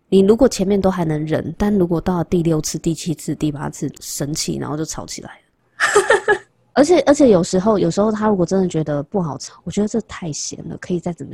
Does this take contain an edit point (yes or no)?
yes